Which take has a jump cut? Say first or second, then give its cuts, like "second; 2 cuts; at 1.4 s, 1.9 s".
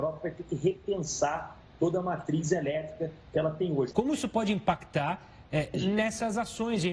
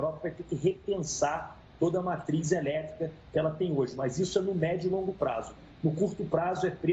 first; 2 cuts; at 3.9 s, 5.7 s